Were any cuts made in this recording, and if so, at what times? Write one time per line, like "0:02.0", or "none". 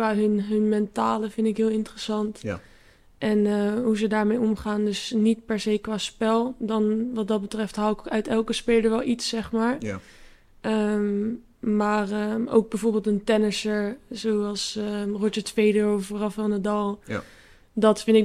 none